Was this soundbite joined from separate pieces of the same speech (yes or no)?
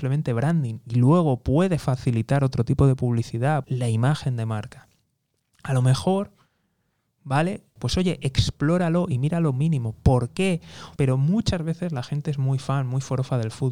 yes